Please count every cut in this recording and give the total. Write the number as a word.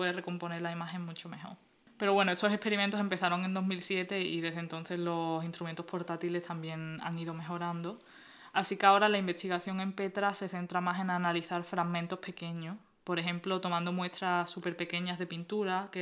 zero